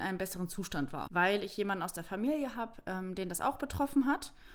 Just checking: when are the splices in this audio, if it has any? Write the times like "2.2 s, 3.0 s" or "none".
1.1 s